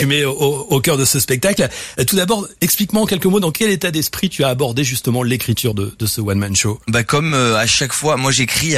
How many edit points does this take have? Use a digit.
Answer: 0